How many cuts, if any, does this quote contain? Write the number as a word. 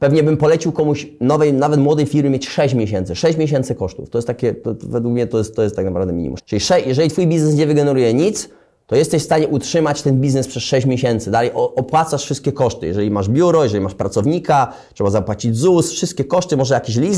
one